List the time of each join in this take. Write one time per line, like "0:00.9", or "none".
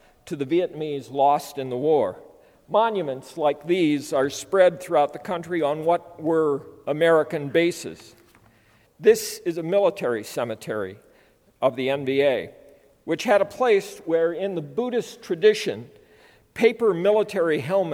0:02.5
0:08.9